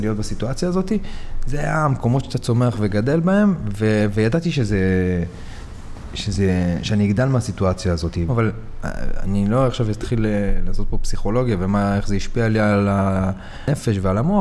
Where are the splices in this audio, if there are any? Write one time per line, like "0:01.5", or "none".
0:08.3

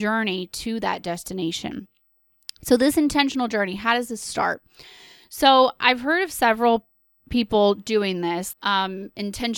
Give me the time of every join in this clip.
0:08.5

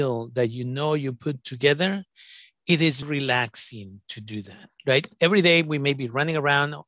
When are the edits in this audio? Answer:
0:03.0
0:04.8

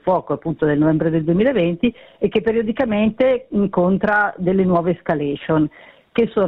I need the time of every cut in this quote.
none

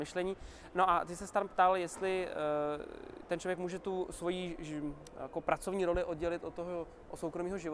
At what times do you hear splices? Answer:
none

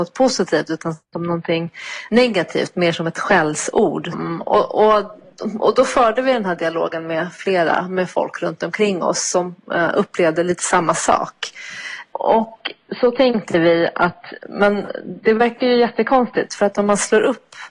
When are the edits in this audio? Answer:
0:04.1

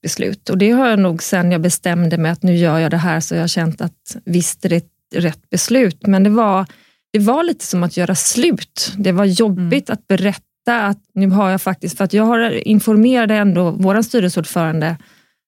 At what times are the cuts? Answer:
none

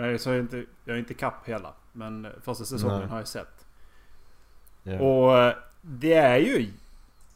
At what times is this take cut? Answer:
0:05.8

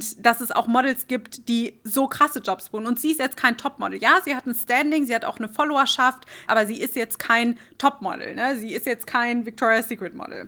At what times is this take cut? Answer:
0:06.5

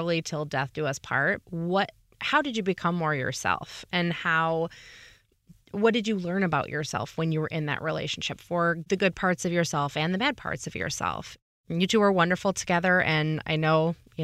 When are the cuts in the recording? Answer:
0:01.4

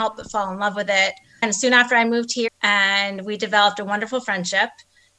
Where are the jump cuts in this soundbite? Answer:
0:01.4
0:02.5

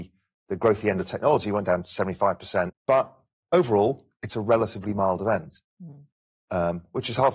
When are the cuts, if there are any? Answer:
0:02.7

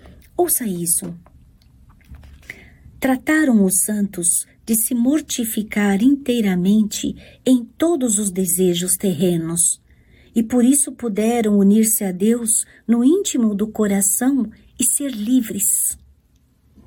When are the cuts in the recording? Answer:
none

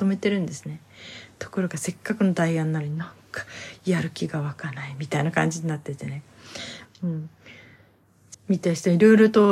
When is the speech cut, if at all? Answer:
0:06.8
0:08.3

